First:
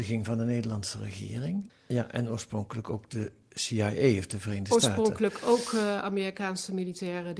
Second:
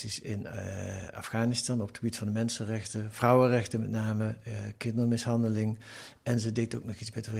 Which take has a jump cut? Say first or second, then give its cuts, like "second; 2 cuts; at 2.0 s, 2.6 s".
first; 1 cut; at 1.7 s